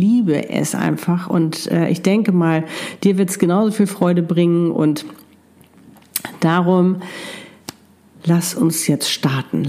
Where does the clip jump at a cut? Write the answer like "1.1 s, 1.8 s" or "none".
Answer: none